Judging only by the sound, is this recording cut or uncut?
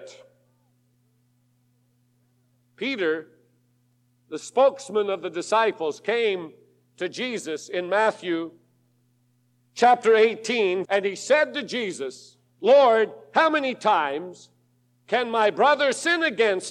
cut